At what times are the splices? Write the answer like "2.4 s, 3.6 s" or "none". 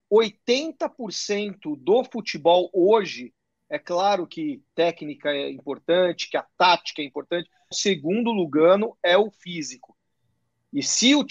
7.7 s